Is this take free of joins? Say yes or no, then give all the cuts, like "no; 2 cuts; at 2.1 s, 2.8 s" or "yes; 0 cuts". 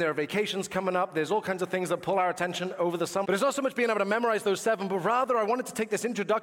no; 1 cut; at 3.2 s